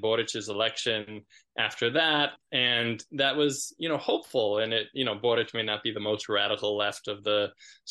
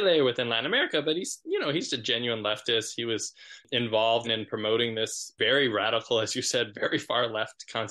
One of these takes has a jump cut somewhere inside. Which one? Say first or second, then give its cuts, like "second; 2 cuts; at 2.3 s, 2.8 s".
second; 1 cut; at 4.2 s